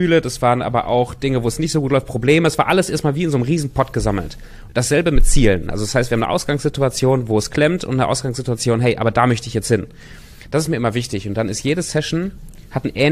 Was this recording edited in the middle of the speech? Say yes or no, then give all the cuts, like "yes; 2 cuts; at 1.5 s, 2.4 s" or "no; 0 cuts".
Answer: no; 0 cuts